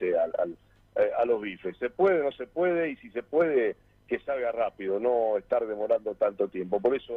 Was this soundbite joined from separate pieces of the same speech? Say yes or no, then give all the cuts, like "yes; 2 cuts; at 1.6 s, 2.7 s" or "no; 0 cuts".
no; 0 cuts